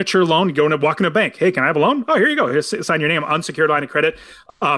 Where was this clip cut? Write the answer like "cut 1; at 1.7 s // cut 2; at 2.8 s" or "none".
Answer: none